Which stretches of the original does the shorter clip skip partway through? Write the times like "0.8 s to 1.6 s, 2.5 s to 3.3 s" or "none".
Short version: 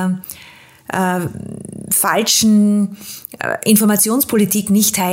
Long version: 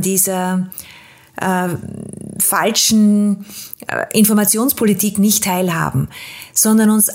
none